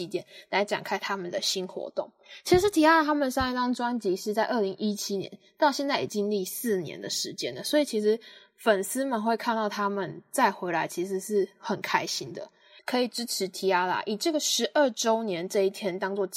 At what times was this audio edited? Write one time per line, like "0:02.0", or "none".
0:06.1
0:12.8